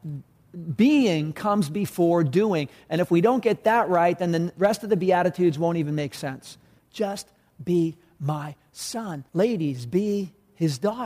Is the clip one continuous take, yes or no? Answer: no